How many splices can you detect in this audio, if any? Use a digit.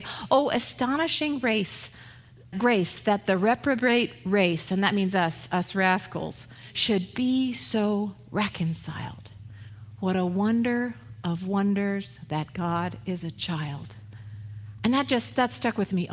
1